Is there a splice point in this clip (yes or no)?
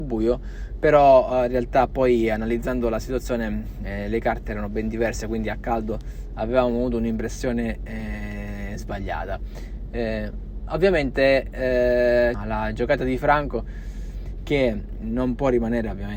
yes